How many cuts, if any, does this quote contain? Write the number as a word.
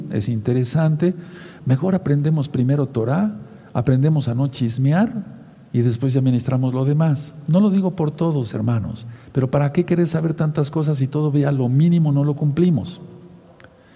one